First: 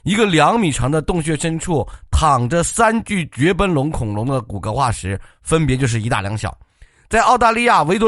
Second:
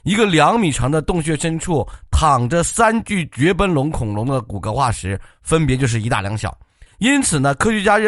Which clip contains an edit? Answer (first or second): second